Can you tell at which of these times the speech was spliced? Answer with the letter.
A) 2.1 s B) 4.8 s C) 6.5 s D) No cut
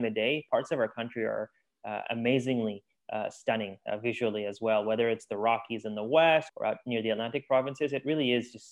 C